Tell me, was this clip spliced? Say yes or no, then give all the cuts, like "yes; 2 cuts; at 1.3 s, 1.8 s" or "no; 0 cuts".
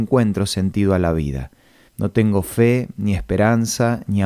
yes; 1 cut; at 1.9 s